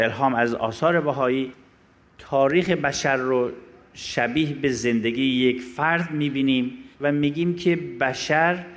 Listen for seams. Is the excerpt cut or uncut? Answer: cut